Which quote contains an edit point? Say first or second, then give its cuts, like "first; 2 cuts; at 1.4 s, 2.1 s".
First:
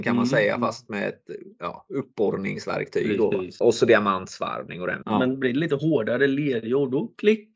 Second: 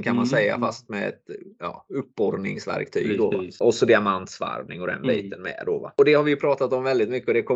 first; 1 cut; at 5.0 s